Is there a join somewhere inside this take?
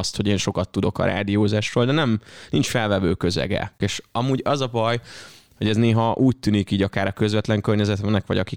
yes; 1 cut; at 3.8 s

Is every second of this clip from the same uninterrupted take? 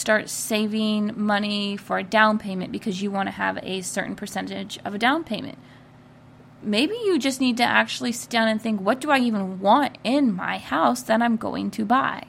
yes; 0 cuts

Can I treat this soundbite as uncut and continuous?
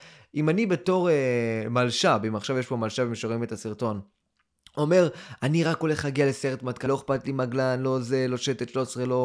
no; 1 cut; at 6.9 s

